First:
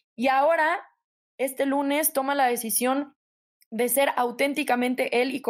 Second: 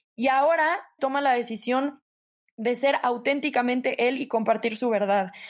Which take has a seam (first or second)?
second